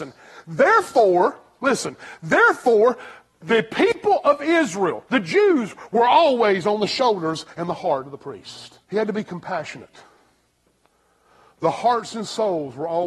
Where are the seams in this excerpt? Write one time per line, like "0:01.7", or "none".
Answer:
0:05.1
0:08.8